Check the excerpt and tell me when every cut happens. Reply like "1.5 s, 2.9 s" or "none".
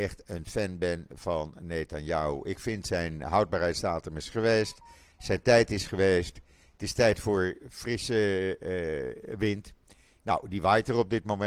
none